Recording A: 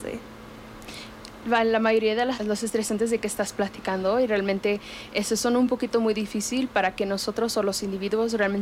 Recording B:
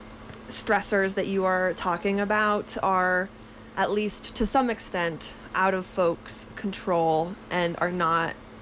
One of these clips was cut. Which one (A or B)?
A